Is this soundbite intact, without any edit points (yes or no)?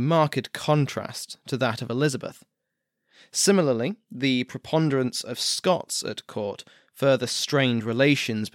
yes